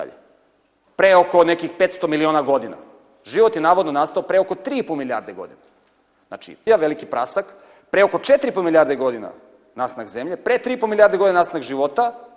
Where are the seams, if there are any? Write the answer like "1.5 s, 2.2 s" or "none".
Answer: 6.7 s